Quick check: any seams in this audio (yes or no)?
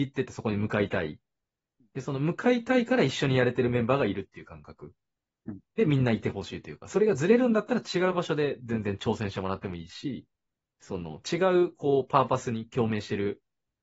no